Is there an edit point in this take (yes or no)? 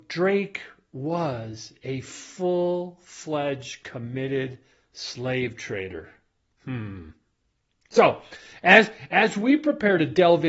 no